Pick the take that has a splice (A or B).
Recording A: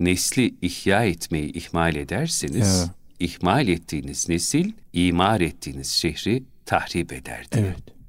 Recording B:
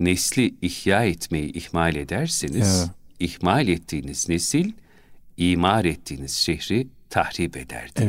A